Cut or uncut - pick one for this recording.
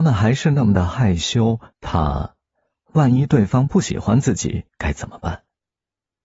cut